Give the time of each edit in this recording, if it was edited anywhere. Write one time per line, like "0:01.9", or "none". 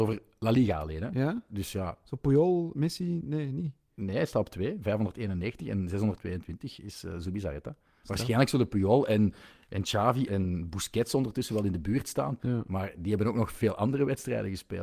0:10.3
0:12.4